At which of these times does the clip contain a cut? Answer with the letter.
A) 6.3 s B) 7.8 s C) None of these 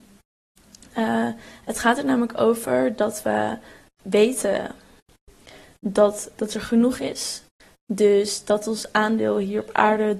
A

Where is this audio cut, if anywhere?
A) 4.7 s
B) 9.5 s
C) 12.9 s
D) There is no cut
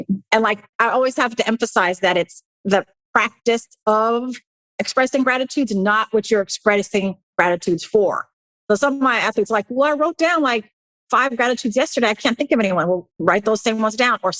D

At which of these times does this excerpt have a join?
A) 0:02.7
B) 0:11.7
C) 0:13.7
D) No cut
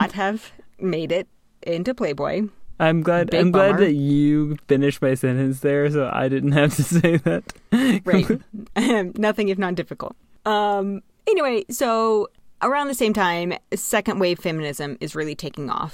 D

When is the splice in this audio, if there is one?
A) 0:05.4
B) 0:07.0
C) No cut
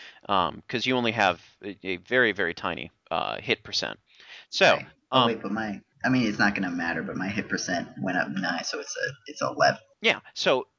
C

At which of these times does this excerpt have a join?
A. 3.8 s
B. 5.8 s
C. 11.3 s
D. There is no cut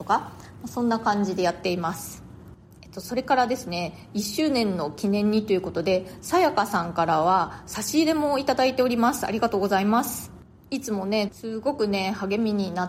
C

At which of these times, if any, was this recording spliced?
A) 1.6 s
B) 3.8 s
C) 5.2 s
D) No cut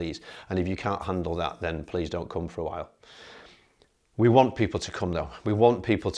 D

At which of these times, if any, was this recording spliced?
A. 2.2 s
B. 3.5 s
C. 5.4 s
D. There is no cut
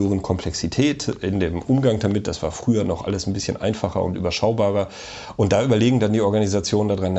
D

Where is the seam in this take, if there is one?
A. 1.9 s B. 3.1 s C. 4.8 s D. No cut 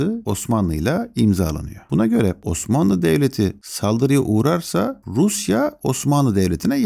D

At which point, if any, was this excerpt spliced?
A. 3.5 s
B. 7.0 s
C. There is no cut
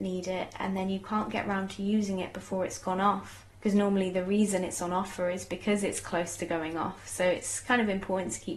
A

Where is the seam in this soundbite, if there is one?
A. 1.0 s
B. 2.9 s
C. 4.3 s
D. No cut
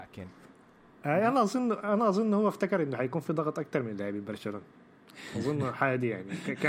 A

